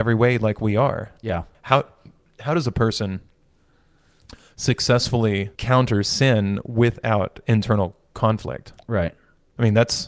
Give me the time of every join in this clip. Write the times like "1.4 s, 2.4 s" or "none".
1.5 s, 5.6 s